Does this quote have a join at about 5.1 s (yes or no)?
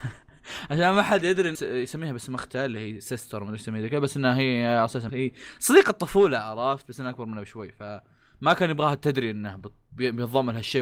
yes